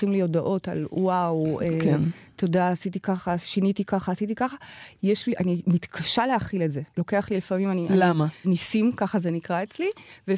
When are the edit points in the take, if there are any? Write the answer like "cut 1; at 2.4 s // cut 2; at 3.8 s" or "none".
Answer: cut 1; at 5.3 s // cut 2; at 6.9 s // cut 3; at 8.4 s